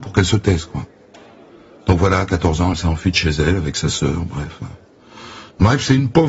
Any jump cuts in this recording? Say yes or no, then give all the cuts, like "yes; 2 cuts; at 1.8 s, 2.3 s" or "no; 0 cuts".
no; 0 cuts